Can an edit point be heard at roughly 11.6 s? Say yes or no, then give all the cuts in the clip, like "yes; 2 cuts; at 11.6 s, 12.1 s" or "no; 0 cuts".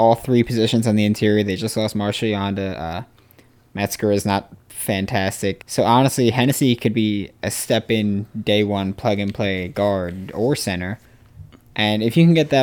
no; 1 cut; at 5.6 s